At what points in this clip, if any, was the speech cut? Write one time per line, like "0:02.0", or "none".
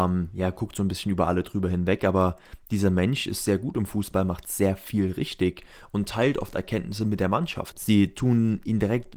0:07.7